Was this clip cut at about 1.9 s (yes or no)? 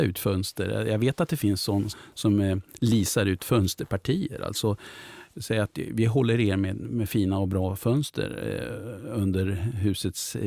yes